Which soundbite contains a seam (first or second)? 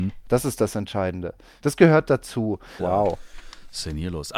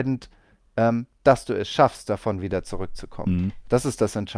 first